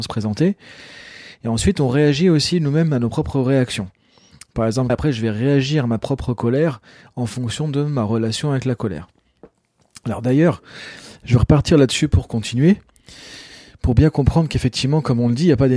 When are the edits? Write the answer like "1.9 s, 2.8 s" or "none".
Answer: 4.9 s